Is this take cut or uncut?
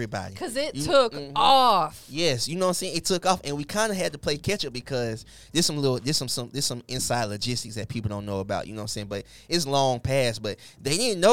uncut